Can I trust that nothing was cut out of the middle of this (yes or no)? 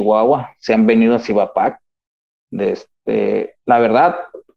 yes